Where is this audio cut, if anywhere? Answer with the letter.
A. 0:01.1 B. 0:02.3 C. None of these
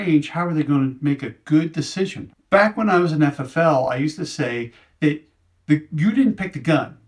B